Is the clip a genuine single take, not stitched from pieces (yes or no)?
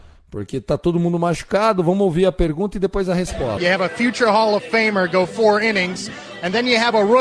no